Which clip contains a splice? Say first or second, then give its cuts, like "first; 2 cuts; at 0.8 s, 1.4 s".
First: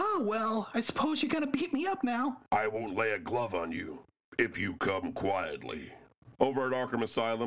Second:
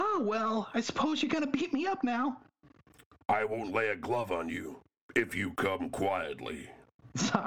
first; 2 cuts; at 2.5 s, 6.3 s